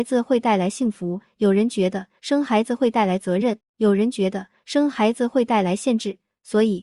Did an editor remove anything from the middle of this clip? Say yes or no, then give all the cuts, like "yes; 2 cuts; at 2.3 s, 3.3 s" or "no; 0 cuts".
no; 0 cuts